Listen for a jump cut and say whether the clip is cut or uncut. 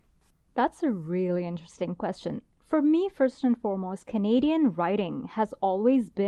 uncut